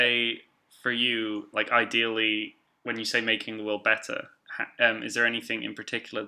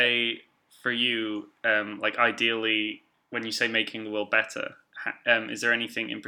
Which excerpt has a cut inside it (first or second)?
first